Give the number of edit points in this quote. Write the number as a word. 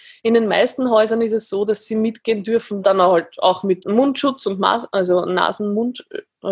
two